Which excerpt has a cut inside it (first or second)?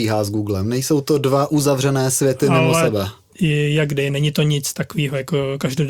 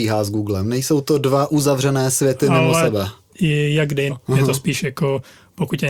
second